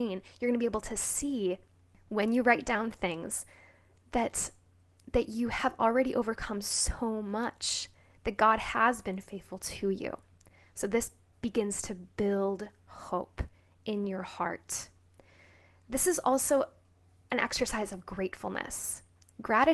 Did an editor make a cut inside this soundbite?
no; 0 cuts

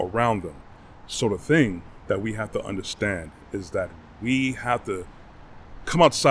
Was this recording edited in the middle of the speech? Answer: no; 0 cuts

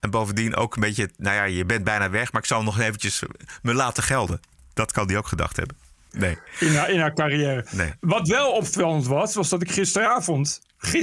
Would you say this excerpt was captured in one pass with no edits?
no; 1 cut; at 6.1 s

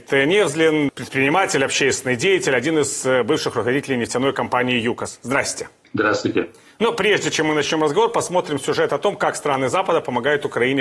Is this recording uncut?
yes; 0 cuts

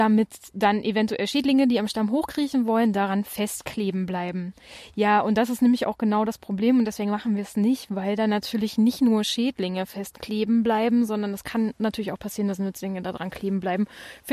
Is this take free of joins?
yes; 0 cuts

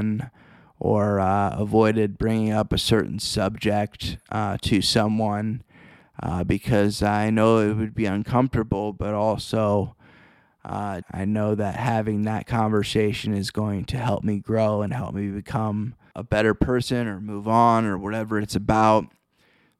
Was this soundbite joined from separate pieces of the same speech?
yes; 2 cuts; at 11.0 s, 16.1 s

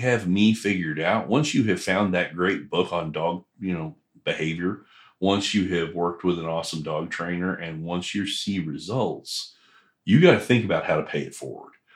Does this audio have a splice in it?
no; 0 cuts

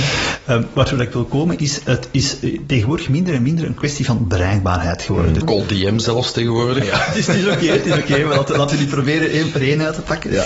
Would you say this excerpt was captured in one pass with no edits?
no; 2 cuts; at 5.4 s, 6.8 s

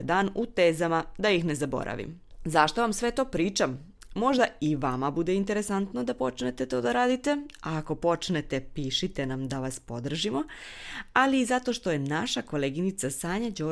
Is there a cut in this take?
no; 0 cuts

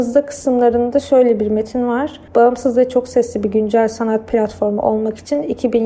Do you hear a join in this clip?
yes; 1 cut; at 2.3 s

